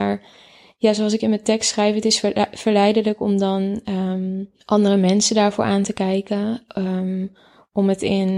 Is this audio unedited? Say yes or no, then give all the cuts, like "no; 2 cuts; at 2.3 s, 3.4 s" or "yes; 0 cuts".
yes; 0 cuts